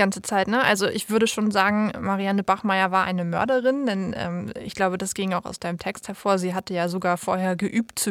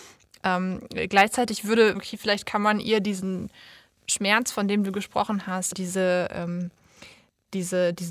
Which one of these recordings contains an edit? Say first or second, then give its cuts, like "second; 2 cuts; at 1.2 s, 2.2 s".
second; 2 cuts; at 1.9 s, 5.7 s